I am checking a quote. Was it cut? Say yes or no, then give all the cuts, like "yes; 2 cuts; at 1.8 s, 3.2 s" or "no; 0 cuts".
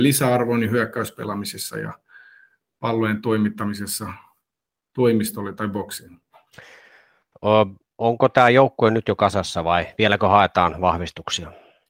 no; 0 cuts